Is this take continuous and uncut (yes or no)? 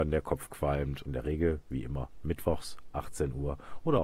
no